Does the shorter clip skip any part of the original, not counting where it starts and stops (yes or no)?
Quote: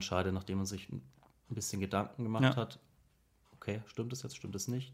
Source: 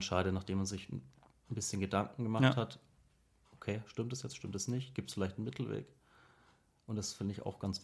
no